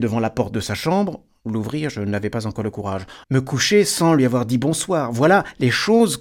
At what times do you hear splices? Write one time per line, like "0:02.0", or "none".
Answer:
0:03.2